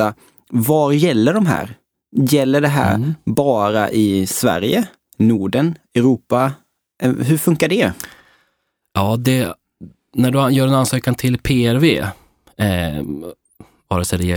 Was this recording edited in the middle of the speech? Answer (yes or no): no